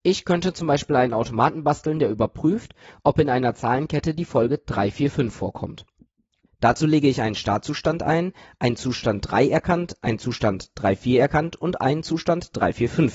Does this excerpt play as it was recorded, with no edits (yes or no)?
yes